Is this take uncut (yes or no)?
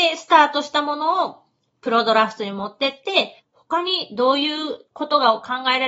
no